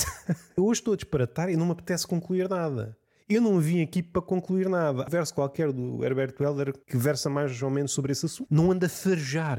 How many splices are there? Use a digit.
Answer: 2